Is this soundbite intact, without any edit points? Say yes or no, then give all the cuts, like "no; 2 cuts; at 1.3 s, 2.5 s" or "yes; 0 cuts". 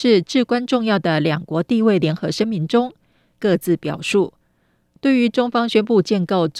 no; 1 cut; at 3.4 s